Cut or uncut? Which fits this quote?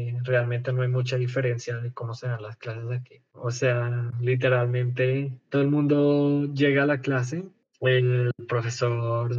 uncut